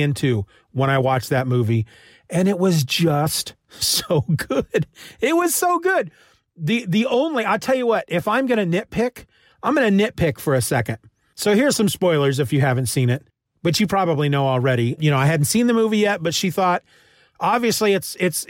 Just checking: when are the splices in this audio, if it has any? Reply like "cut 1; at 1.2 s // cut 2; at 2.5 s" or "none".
cut 1; at 15.0 s